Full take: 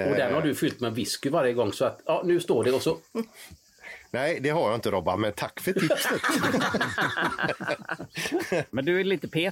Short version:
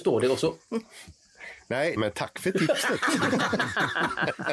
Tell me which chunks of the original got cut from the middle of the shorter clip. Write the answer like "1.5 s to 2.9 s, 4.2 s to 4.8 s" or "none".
4.4 s to 5.2 s